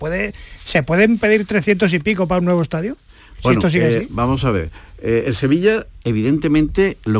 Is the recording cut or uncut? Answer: uncut